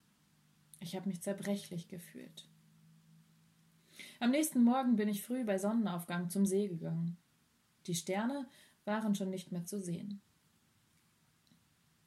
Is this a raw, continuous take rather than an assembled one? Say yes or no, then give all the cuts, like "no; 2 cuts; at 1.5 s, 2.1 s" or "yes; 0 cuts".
yes; 0 cuts